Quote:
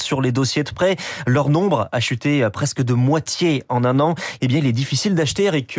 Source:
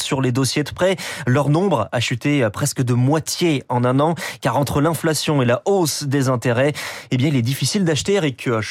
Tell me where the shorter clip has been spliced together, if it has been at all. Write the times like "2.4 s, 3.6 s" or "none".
4.4 s